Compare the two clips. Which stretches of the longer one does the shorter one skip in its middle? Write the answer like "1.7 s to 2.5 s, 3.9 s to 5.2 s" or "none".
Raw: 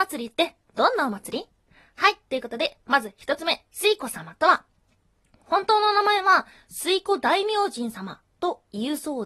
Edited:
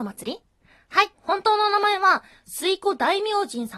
2.2 s to 5.4 s